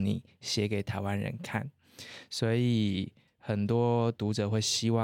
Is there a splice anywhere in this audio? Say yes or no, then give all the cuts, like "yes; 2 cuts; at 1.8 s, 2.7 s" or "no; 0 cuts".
no; 0 cuts